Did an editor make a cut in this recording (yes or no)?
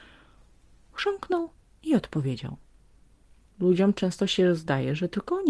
yes